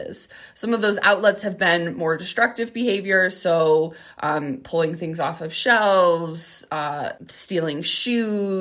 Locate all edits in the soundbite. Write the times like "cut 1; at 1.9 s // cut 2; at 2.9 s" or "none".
cut 1; at 7.2 s